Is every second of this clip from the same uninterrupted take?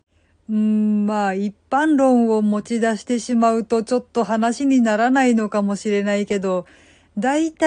yes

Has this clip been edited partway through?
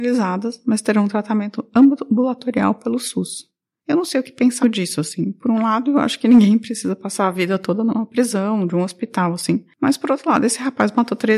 yes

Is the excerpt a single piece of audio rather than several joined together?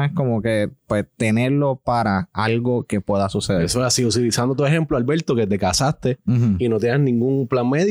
yes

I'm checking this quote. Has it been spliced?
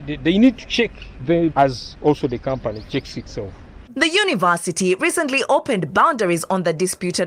yes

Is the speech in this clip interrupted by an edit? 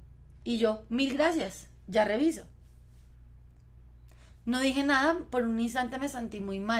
no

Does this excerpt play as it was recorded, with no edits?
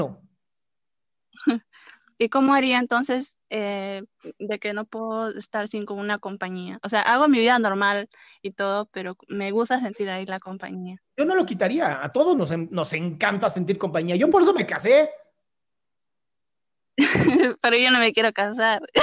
yes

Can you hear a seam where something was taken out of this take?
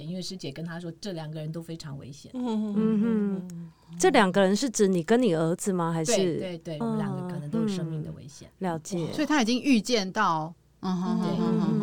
yes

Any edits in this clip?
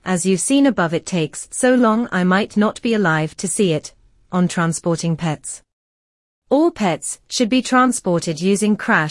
no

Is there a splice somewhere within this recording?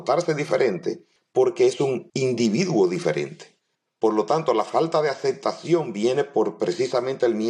no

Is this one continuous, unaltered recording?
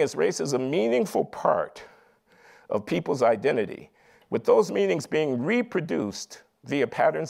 yes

